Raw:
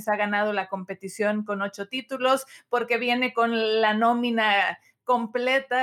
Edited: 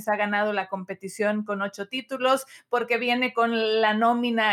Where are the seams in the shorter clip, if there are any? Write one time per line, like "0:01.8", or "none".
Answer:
none